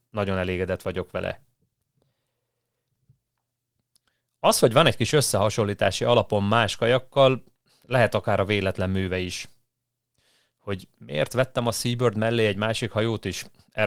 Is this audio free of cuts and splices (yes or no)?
yes